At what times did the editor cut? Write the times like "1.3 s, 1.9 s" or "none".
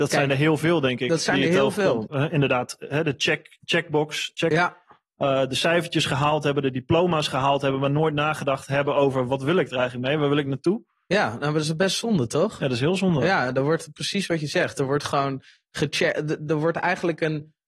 2.1 s